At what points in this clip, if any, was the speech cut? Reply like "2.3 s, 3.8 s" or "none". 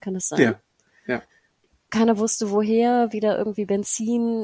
none